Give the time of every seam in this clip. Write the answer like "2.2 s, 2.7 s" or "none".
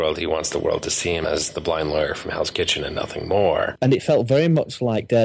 3.8 s